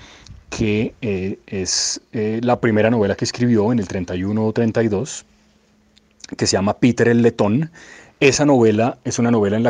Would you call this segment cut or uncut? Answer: uncut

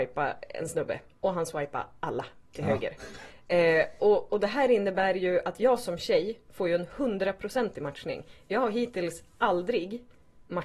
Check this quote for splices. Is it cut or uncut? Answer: uncut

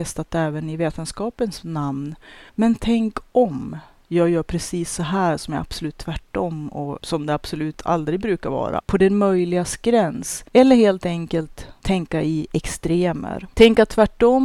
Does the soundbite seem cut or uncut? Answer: cut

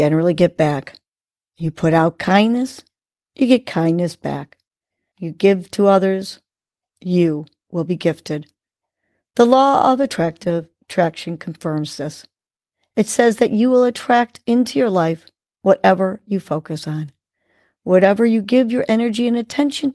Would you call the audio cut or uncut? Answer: cut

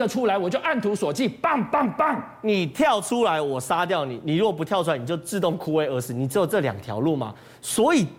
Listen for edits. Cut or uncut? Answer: uncut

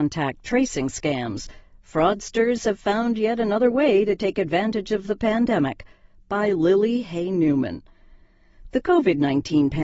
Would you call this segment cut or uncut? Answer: uncut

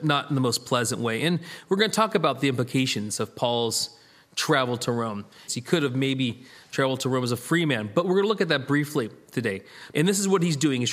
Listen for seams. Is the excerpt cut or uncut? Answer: cut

